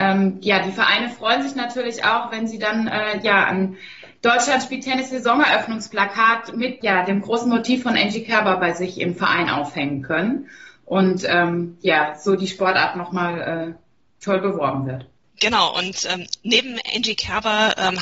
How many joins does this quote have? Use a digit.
1